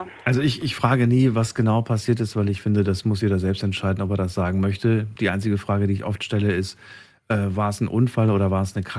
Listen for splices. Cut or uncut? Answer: uncut